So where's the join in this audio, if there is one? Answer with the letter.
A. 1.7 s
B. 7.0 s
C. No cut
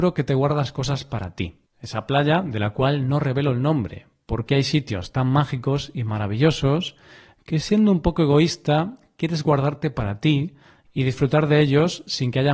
A